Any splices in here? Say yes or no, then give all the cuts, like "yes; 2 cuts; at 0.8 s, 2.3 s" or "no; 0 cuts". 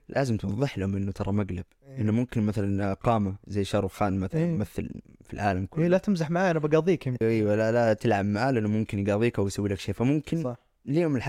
yes; 1 cut; at 7.2 s